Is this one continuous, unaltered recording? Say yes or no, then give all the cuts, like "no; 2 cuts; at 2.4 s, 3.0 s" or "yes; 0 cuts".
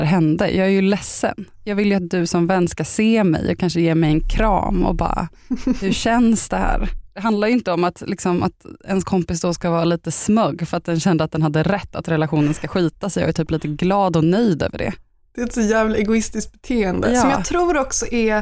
yes; 0 cuts